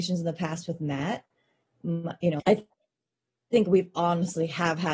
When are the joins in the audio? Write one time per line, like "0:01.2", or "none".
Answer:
0:02.4